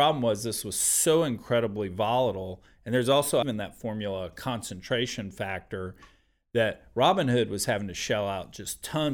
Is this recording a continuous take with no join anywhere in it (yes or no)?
no